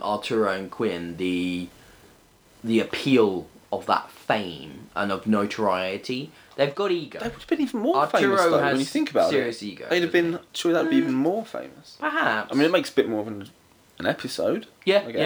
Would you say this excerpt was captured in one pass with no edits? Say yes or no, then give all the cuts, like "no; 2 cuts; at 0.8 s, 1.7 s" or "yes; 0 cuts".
no; 1 cut; at 10.5 s